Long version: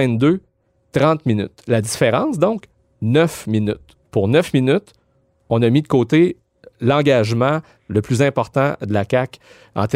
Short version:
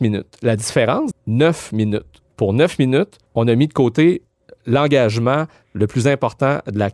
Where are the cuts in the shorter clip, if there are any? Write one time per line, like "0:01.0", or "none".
0:01.1
0:03.3